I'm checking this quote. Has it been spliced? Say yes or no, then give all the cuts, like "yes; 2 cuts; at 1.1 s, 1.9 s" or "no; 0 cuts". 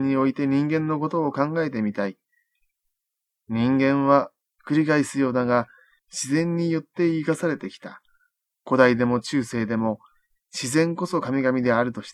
no; 0 cuts